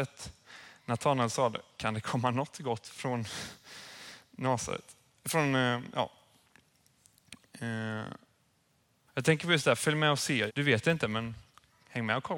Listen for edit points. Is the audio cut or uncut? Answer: cut